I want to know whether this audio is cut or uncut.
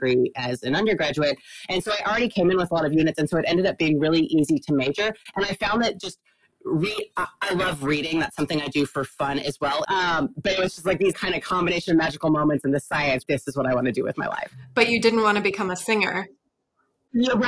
cut